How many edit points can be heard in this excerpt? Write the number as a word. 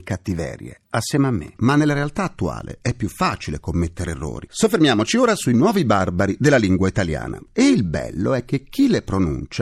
three